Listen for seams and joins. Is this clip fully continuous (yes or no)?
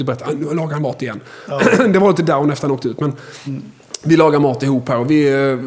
yes